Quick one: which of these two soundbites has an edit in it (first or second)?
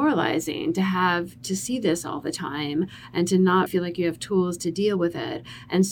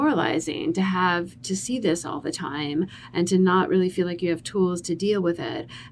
first